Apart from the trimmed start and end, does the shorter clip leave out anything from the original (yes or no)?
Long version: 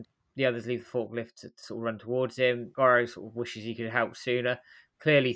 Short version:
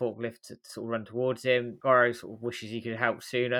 no